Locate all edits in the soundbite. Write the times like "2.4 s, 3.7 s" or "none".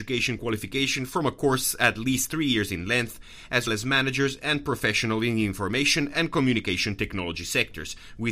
3.7 s